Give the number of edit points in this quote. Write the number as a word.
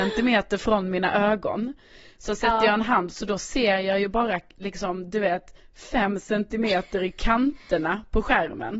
zero